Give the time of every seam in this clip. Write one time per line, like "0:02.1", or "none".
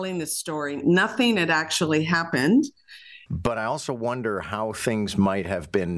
0:03.3

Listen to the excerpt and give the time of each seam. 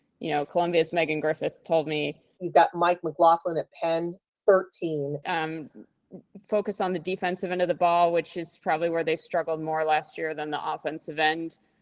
0:02.4
0:05.2

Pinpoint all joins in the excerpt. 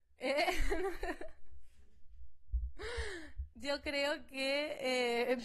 none

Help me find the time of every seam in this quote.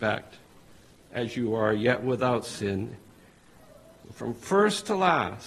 none

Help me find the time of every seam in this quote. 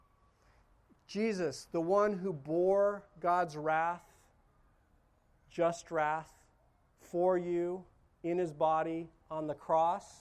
none

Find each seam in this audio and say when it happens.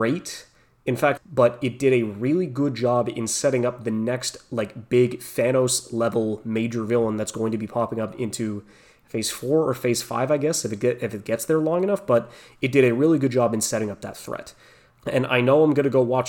0:01.2

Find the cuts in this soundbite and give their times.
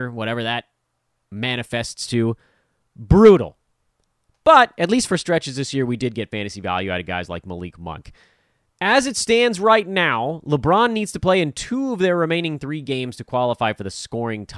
none

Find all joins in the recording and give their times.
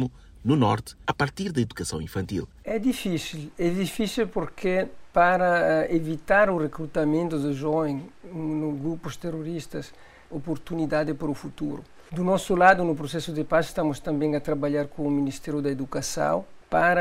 0:10.3

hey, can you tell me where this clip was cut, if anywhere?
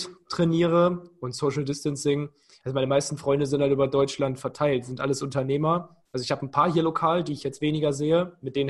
none

